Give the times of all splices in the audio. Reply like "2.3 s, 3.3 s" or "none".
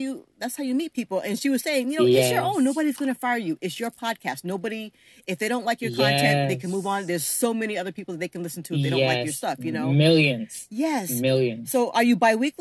none